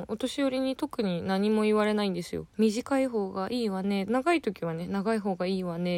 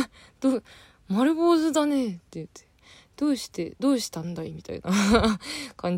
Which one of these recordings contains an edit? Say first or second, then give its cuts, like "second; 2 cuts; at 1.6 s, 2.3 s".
first; 2 cuts; at 2.5 s, 4.1 s